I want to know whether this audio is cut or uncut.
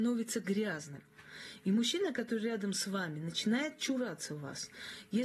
uncut